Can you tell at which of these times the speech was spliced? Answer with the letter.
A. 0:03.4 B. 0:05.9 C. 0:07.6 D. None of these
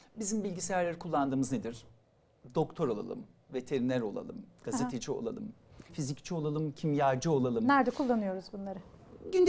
B